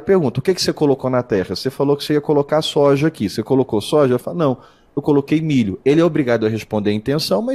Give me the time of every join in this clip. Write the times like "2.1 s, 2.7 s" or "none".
none